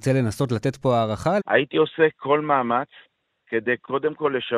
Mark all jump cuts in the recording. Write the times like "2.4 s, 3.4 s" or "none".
1.4 s

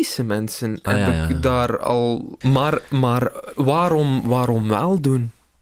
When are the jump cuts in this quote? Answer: 2.4 s

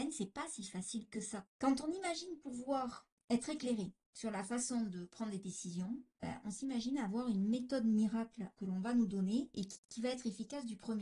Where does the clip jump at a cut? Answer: 1.4 s, 8.5 s

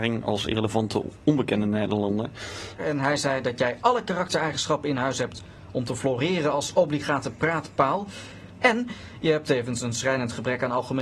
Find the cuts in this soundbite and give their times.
2.8 s, 8.6 s

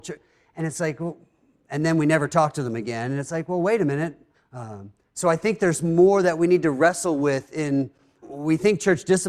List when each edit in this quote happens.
4.3 s, 8.2 s

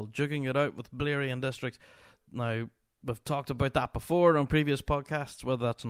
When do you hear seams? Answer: 2.2 s

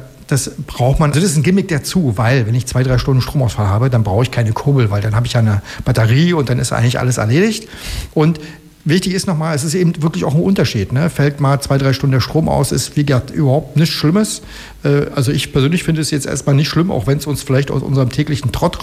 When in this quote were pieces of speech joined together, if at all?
1.1 s

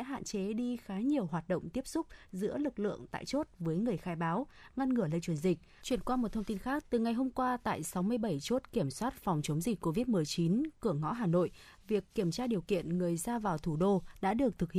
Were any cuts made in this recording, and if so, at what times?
5.8 s, 6.8 s

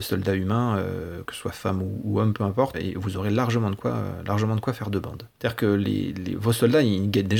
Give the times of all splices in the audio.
2.7 s, 5.4 s

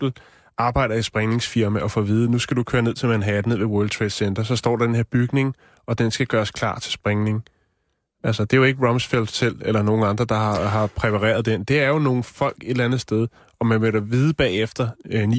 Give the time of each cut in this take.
none

